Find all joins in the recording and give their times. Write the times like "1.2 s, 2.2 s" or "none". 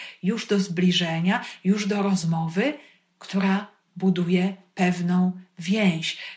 none